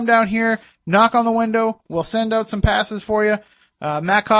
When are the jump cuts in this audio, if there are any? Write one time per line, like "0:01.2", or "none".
none